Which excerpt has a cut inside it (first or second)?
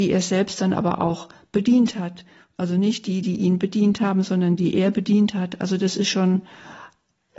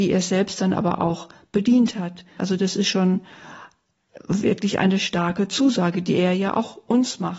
second